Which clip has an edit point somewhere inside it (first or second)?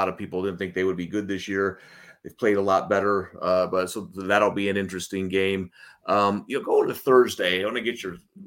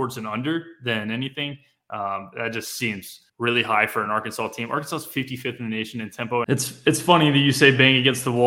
second